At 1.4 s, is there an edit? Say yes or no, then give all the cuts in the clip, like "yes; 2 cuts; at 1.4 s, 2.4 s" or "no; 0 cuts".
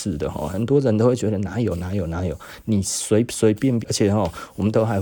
no; 1 cut; at 3.8 s